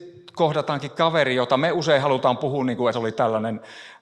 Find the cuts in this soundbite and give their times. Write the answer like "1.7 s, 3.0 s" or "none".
2.9 s